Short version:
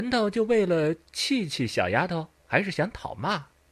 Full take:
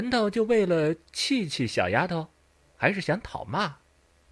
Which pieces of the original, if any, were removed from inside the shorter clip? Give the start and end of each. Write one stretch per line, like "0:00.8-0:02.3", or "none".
0:02.4-0:02.7